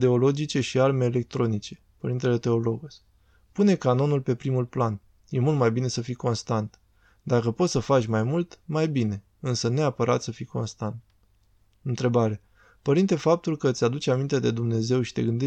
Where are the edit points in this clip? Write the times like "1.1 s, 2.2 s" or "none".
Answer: none